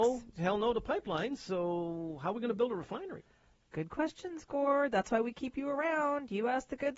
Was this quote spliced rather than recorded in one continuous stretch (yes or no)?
no